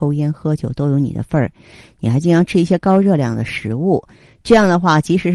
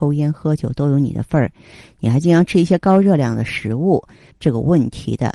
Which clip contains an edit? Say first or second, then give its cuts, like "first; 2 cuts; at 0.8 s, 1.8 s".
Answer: second; 1 cut; at 4.3 s